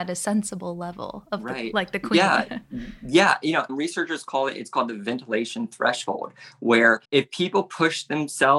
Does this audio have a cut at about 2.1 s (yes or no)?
no